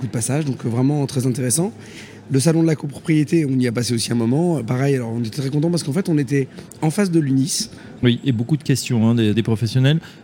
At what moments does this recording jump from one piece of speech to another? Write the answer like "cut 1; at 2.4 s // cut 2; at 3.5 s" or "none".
cut 1; at 8.0 s // cut 2; at 9.3 s